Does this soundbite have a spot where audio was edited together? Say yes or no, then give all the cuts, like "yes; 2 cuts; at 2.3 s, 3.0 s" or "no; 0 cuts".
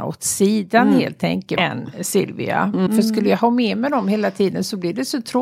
yes; 2 cuts; at 1.6 s, 2.9 s